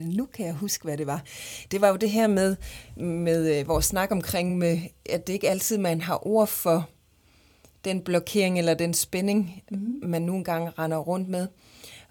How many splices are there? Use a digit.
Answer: 0